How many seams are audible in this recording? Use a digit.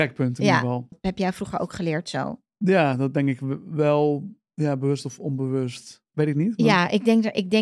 2